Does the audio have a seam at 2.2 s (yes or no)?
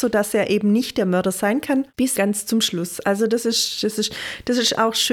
yes